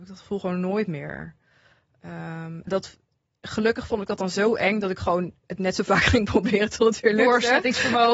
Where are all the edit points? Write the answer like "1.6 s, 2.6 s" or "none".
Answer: 2.7 s, 5.4 s